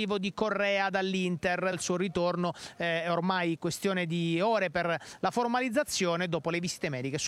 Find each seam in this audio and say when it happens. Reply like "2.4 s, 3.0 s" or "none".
1.7 s